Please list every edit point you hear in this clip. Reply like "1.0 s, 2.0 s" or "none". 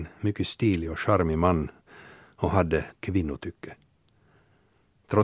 2.9 s